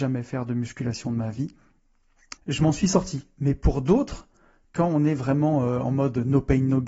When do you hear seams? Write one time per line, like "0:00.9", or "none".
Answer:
0:02.4